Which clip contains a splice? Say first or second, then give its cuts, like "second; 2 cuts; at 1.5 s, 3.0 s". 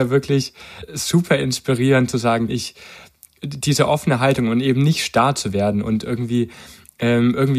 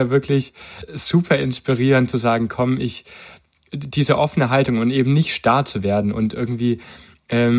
first; 1 cut; at 2.5 s